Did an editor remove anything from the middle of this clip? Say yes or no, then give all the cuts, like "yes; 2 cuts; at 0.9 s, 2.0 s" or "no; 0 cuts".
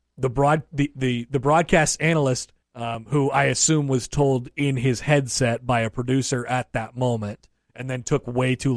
yes; 1 cut; at 2.6 s